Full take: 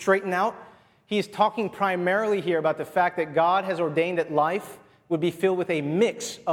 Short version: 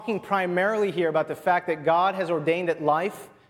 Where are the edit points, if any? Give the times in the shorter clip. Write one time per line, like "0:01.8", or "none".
none

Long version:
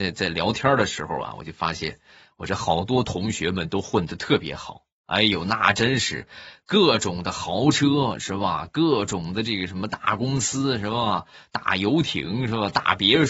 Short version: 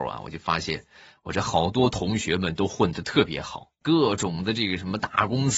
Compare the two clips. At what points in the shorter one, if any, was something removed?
0:03.8

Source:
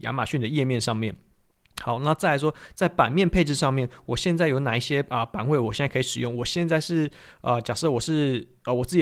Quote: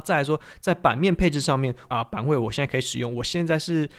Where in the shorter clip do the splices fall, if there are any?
0:01.9

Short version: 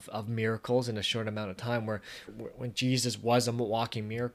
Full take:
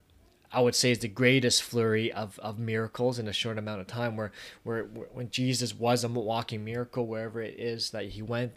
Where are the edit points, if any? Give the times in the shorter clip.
0:02.3

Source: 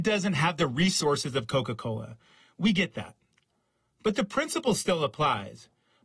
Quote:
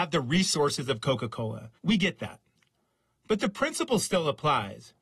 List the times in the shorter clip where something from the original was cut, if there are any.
0:01.8

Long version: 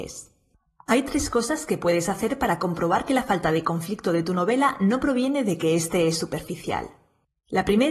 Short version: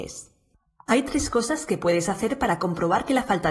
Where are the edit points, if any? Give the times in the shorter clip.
none

